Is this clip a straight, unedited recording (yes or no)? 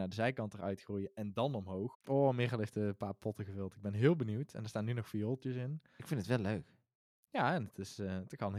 no